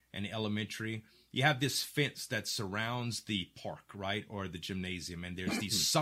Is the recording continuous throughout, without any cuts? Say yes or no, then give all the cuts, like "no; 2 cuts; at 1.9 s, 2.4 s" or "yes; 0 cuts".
yes; 0 cuts